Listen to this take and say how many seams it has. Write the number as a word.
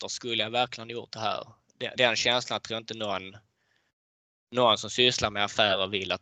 one